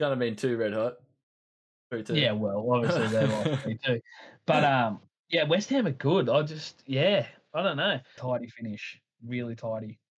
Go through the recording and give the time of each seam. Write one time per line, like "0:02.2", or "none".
0:08.2